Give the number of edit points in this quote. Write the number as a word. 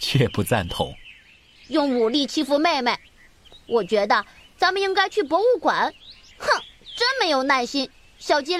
two